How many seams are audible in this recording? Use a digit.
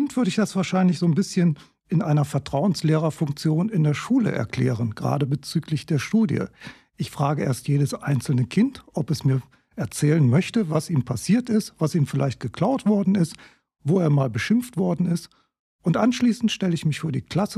0